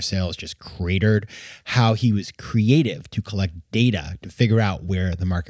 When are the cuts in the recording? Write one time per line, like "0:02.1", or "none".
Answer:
none

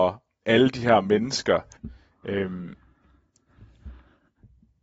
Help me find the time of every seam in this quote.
0:01.8

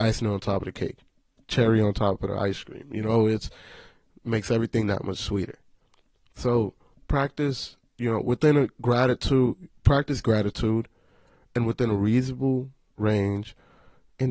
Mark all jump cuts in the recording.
0:06.9

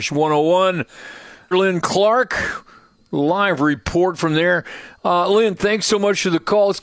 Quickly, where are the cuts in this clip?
0:01.5

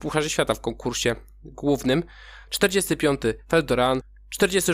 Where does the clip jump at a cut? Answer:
none

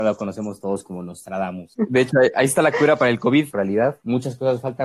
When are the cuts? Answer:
0:01.7
0:03.5

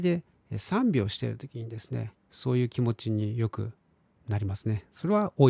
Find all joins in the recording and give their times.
none

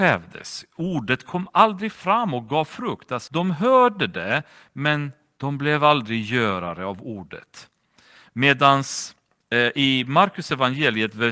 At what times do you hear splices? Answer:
0:03.3

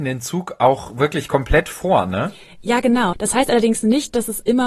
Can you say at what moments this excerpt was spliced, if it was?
0:03.1

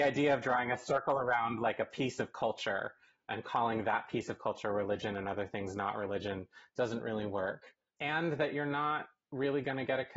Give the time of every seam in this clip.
none

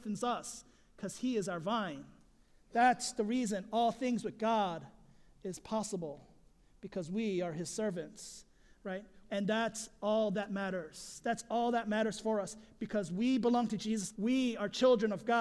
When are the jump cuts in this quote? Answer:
0:09.2
0:14.1

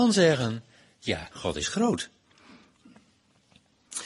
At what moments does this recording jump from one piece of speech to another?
0:01.3

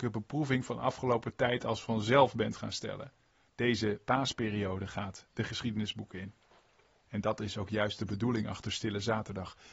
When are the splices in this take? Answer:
0:03.5
0:07.0

